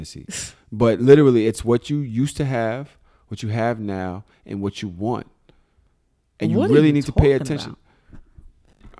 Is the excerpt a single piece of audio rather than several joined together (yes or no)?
yes